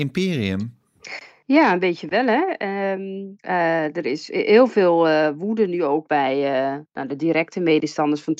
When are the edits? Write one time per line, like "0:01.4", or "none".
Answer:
none